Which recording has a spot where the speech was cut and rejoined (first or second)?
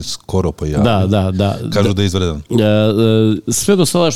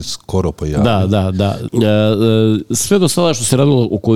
second